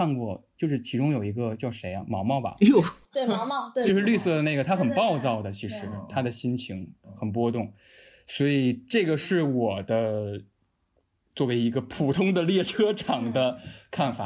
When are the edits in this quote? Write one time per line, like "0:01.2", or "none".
none